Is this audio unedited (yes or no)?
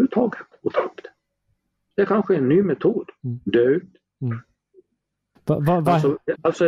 no